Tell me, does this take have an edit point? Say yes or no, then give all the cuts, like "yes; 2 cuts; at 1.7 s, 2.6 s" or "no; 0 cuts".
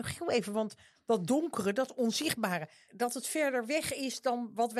yes; 1 cut; at 2.9 s